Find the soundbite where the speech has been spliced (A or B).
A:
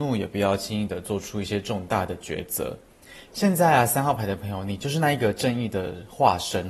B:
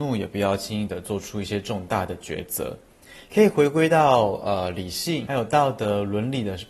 A